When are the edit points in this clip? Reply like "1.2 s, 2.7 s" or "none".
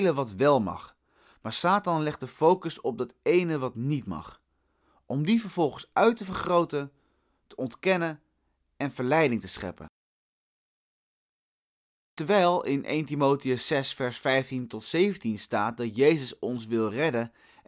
none